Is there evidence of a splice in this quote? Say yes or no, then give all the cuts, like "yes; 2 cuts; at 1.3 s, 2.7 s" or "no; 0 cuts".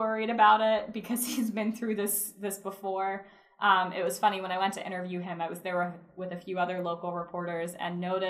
no; 0 cuts